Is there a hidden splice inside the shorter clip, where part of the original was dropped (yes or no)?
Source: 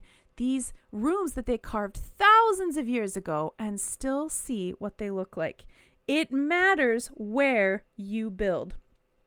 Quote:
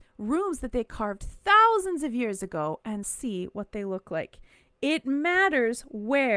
yes